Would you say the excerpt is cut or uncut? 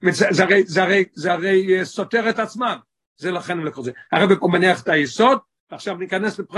cut